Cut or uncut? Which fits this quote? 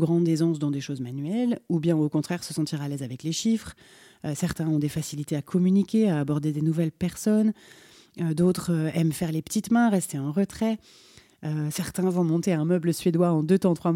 uncut